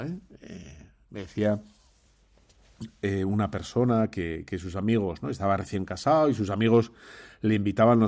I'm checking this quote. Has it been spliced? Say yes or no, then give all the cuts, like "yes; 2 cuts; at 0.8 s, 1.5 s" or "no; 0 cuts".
no; 0 cuts